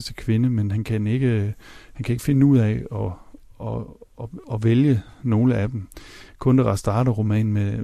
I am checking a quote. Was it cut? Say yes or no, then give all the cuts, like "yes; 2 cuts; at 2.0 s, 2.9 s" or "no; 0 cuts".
no; 0 cuts